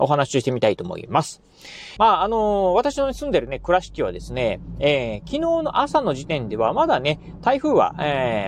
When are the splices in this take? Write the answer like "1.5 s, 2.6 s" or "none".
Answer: 2.0 s